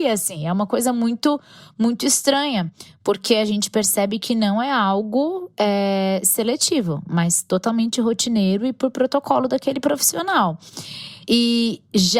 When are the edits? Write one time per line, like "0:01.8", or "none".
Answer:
none